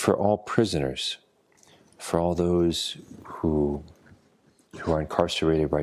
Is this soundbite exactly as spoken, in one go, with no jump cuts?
yes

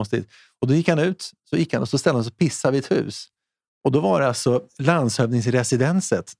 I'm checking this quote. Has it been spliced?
no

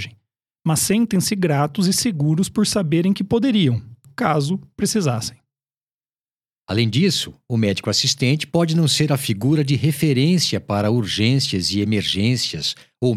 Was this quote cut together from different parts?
yes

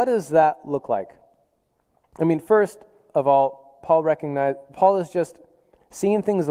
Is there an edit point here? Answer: no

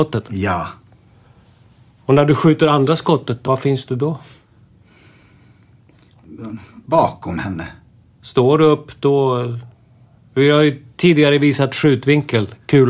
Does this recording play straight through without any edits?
no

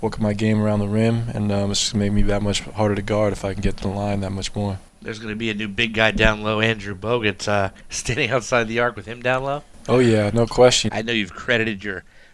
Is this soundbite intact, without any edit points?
no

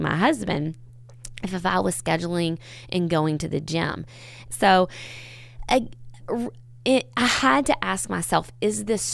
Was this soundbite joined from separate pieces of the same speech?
yes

